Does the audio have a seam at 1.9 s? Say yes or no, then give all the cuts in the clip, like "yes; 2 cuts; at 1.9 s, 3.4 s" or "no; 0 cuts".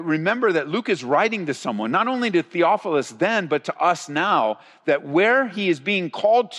no; 0 cuts